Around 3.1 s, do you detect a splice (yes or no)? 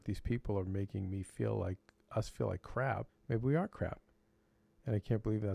yes